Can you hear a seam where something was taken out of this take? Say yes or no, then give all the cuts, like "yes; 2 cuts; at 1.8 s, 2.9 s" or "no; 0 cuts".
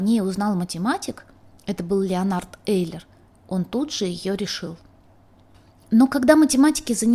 no; 0 cuts